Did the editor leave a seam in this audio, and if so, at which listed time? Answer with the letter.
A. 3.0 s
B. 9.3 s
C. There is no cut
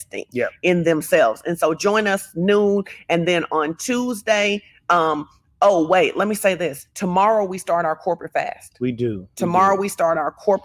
C